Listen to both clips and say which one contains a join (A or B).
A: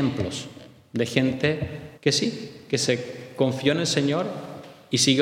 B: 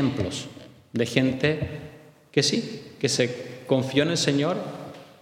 A